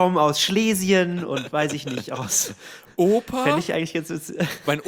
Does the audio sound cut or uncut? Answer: uncut